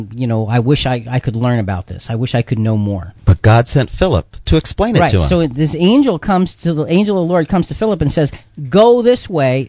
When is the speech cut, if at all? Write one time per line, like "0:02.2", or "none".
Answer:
none